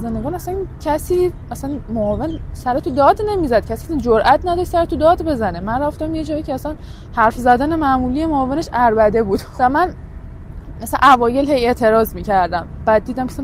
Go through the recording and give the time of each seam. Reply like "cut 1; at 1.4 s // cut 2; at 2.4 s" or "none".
cut 1; at 9.6 s